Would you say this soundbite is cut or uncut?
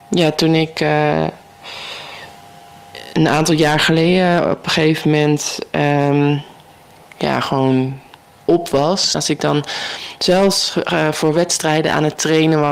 cut